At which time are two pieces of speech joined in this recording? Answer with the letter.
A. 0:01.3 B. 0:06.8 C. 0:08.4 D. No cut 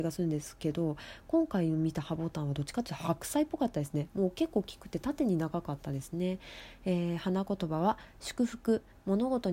D